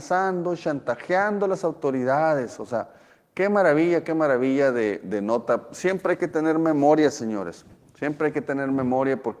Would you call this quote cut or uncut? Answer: uncut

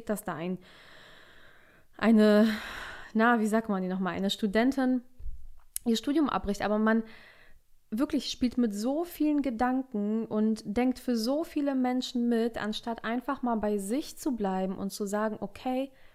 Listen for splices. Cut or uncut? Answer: uncut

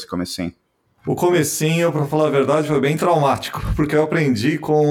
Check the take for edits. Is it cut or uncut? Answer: uncut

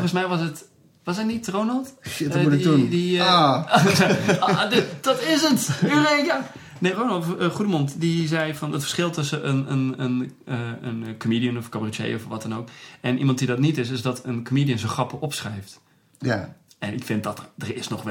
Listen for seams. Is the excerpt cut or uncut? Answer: cut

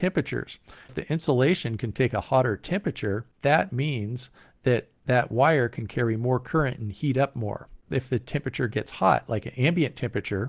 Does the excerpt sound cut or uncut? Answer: uncut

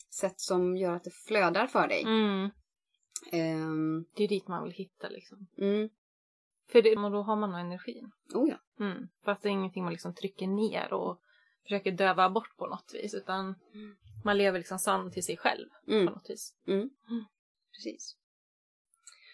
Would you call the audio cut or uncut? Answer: cut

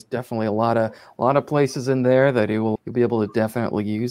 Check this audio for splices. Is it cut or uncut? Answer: cut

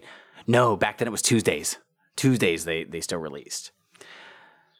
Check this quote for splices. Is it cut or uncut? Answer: uncut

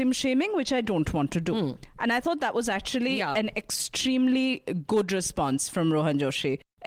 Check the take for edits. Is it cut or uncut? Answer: uncut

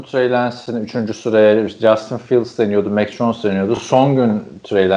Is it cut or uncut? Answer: uncut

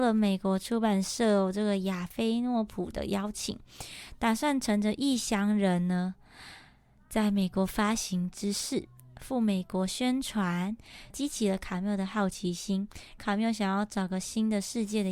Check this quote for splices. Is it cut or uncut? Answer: cut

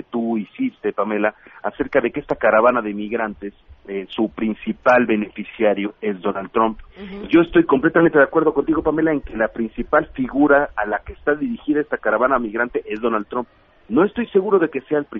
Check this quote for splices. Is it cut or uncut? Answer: cut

